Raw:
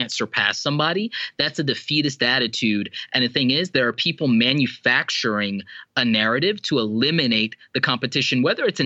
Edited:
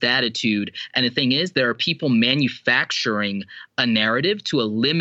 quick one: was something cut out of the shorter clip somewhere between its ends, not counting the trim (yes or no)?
no